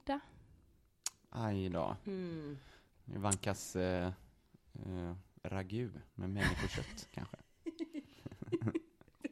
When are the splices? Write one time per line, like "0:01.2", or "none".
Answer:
0:06.1